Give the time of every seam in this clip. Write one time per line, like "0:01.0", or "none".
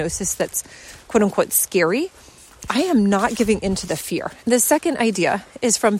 0:02.7
0:04.4